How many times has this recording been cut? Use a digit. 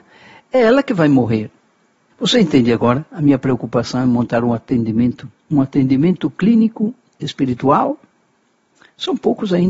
1